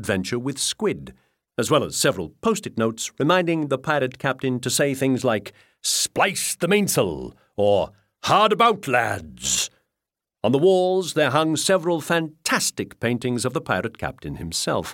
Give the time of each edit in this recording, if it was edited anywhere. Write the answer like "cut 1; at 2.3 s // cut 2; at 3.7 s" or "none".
none